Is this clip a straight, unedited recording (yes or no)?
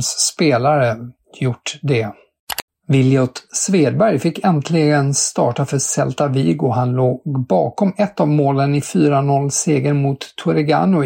yes